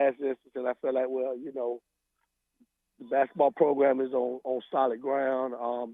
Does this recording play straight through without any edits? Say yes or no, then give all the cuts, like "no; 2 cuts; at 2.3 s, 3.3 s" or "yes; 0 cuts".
yes; 0 cuts